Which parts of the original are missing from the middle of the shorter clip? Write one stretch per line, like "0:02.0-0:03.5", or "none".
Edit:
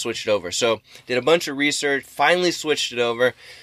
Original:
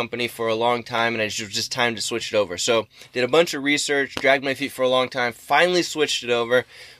0:04.1-0:05.3